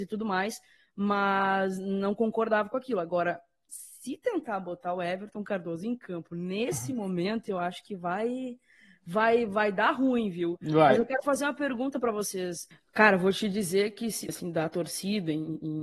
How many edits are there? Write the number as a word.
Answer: two